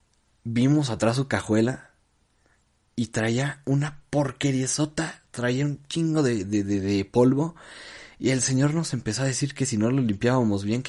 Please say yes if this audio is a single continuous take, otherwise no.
no